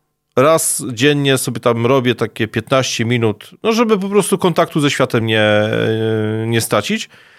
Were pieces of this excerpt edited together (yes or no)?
no